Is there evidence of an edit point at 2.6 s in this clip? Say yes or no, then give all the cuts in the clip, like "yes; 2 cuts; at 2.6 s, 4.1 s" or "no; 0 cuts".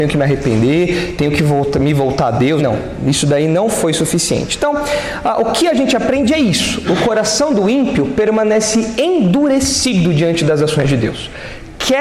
yes; 1 cut; at 2.6 s